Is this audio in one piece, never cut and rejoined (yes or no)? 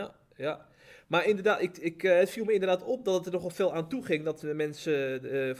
yes